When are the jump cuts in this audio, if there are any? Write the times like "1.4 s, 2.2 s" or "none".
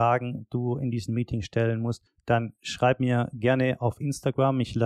none